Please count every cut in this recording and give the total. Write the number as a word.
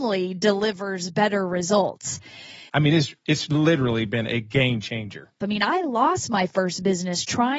two